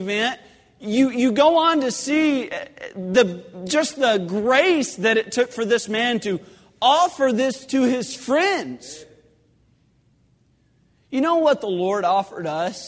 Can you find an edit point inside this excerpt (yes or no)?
no